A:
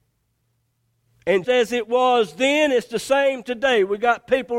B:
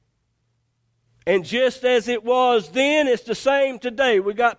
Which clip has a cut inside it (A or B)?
A